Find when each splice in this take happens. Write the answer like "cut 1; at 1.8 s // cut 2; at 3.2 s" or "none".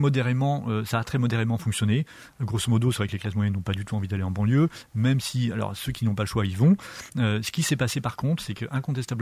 none